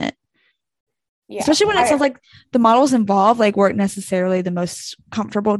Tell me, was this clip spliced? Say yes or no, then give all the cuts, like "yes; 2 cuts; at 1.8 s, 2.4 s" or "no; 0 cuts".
no; 0 cuts